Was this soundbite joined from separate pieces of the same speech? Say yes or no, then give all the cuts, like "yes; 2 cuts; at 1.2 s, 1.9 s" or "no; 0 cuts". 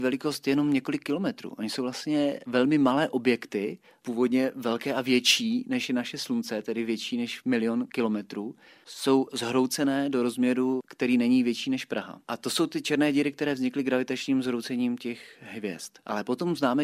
yes; 1 cut; at 4.0 s